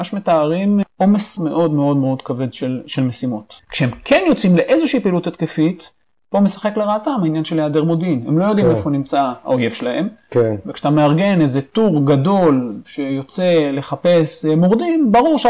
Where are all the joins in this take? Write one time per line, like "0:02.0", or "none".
0:01.4
0:03.6